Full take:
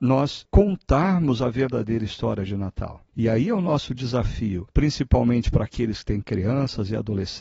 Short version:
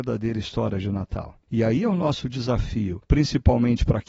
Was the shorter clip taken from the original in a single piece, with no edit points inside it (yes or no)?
yes